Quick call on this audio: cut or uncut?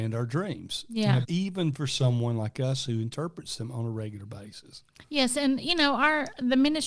cut